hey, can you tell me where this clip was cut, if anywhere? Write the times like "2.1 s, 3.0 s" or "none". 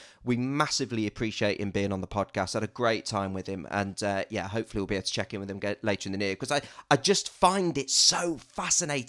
none